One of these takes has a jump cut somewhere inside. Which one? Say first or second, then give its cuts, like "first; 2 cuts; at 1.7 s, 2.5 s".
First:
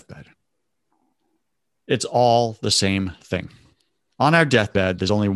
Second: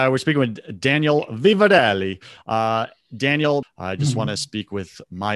second; 2 cuts; at 2.4 s, 3.6 s